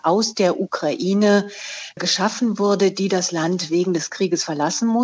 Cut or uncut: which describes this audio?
uncut